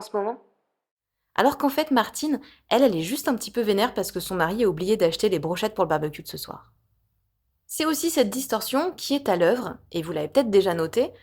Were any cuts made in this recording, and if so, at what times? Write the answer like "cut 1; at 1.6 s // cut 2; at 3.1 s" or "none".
none